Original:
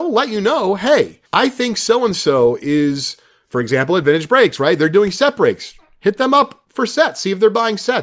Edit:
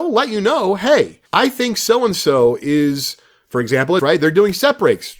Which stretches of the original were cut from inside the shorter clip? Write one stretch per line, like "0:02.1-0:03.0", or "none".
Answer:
0:04.0-0:04.6